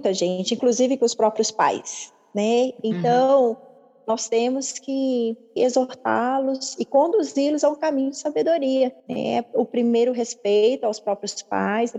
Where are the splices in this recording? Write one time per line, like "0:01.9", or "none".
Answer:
0:05.6
0:09.0

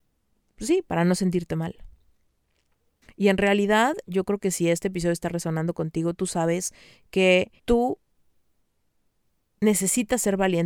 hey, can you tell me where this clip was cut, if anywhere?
0:03.0
0:07.6

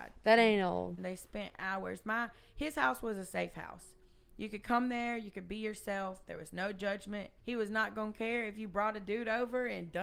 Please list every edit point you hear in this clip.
0:01.0
0:07.4

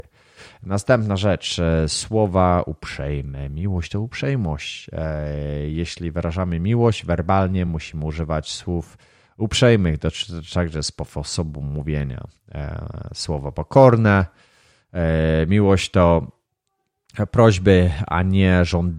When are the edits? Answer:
none

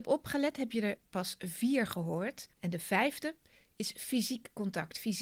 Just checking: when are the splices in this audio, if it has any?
0:02.5

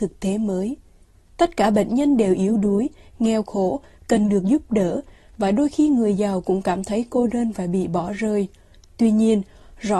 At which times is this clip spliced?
none

